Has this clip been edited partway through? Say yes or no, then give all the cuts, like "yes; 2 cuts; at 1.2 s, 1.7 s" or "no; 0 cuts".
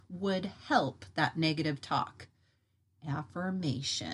no; 0 cuts